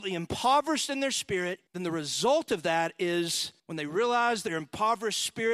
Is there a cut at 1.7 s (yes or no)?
yes